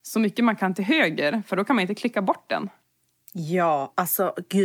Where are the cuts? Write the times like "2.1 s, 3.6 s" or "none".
none